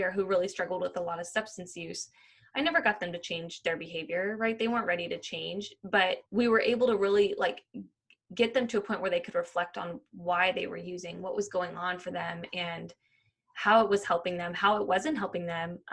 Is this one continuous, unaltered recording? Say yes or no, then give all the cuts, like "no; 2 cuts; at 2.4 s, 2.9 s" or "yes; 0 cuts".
no; 1 cut; at 6.3 s